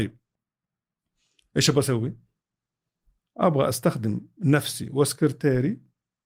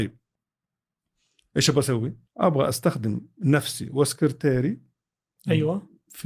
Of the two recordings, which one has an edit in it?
second; 1 cut; at 2.3 s

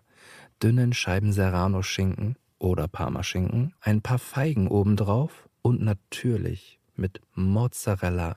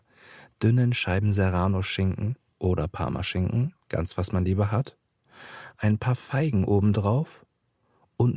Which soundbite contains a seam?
first; 3 cuts; at 3.8 s, 5.5 s, 6.9 s

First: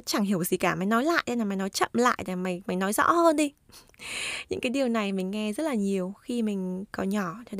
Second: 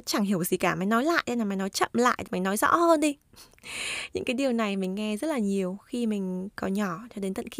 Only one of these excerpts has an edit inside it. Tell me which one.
second; 1 cut; at 2.3 s

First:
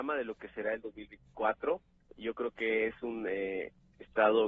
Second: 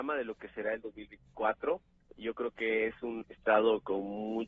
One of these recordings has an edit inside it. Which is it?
second; 1 cut; at 3.2 s

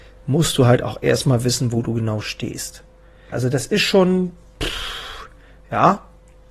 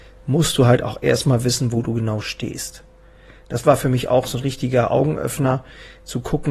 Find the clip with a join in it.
first; 1 cut; at 3.3 s

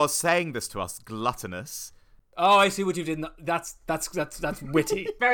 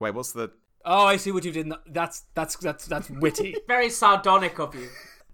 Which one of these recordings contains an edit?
first; 1 cut; at 2.2 s

